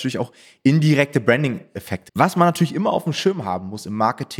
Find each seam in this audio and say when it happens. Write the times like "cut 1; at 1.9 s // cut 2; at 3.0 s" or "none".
cut 1; at 2.1 s